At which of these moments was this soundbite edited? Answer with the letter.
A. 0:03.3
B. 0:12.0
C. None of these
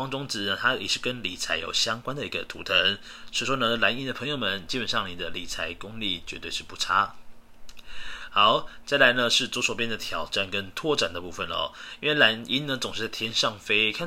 C